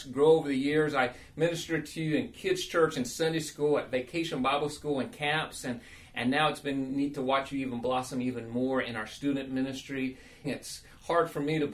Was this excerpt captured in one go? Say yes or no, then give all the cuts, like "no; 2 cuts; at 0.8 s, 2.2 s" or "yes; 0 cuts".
no; 1 cut; at 10.4 s